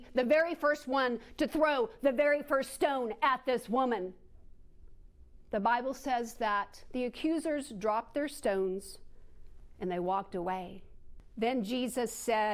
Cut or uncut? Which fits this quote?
uncut